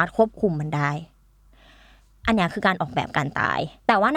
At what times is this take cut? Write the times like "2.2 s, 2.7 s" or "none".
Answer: none